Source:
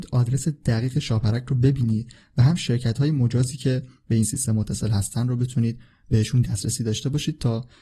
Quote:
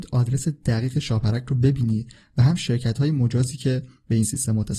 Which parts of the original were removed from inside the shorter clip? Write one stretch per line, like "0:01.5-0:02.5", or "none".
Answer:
none

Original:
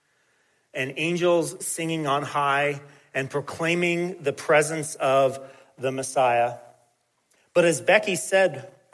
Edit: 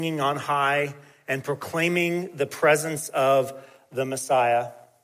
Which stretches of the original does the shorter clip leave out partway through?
none

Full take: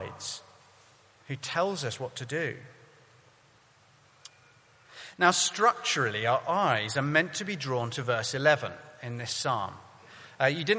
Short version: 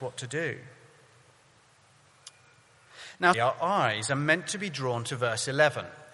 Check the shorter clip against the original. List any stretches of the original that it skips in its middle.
0:05.3-0:06.2

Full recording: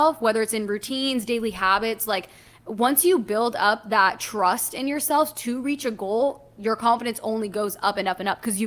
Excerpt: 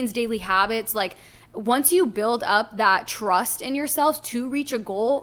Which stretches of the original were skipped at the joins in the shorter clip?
none

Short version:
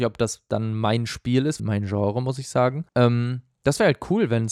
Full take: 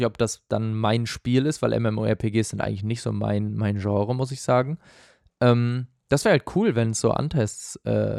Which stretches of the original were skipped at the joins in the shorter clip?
0:01.6-0:03.5
0:04.8-0:05.3

